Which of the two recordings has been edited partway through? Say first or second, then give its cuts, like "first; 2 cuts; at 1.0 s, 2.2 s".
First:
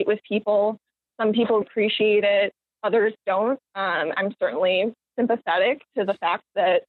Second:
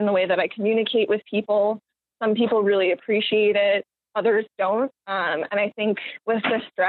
first; 2 cuts; at 1.6 s, 4.2 s